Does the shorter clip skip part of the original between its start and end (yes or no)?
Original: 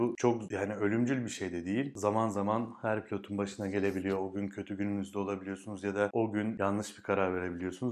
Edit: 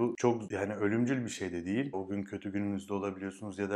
yes